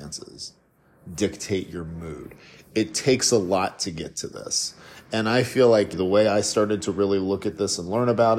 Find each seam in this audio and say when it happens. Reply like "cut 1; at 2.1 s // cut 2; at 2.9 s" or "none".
cut 1; at 5.9 s

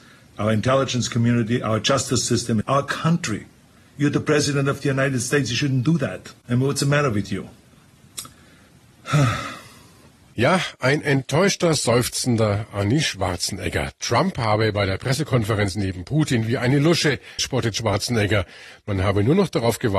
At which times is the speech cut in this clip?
cut 1; at 2.6 s // cut 2; at 17.4 s

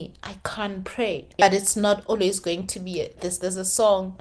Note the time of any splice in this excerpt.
cut 1; at 1.4 s // cut 2; at 3.2 s

